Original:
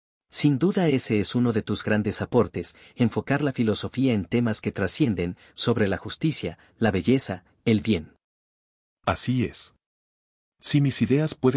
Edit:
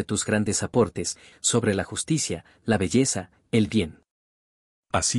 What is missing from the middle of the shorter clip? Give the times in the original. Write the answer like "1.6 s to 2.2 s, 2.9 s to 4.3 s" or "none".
2.9 s to 5.5 s